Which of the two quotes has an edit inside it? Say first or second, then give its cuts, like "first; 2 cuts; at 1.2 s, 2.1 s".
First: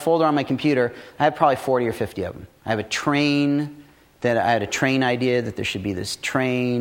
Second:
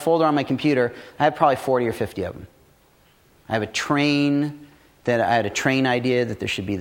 first; 1 cut; at 2.6 s